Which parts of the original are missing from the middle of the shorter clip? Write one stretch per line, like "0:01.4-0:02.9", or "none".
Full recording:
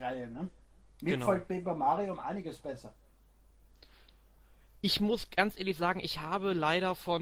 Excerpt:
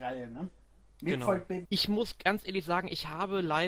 0:01.6-0:04.8